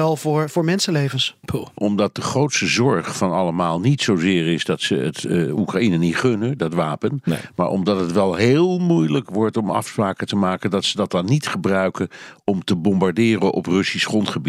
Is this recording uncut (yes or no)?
no